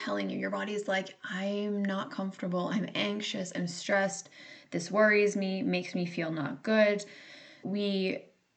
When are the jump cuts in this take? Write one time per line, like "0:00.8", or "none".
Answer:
0:07.6